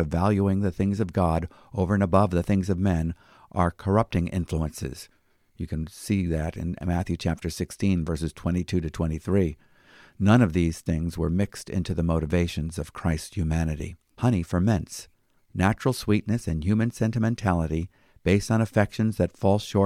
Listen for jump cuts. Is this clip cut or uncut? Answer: cut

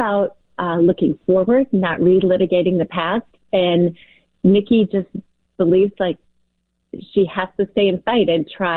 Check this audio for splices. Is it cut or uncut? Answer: uncut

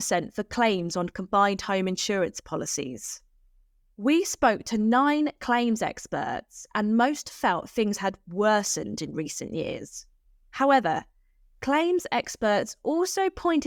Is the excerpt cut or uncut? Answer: uncut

